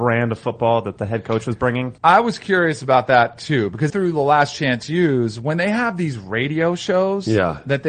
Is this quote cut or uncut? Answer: cut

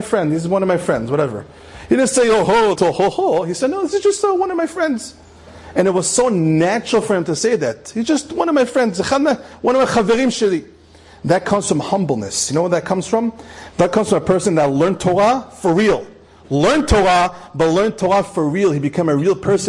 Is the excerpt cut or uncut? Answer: cut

